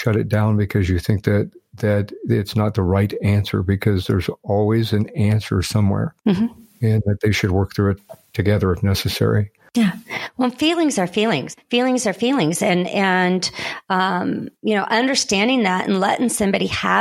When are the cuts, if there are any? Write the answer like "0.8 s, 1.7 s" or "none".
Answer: 11.6 s